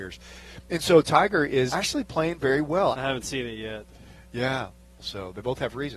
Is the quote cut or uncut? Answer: cut